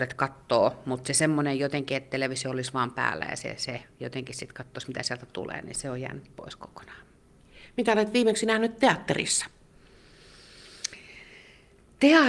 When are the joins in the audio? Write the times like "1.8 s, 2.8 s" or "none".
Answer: none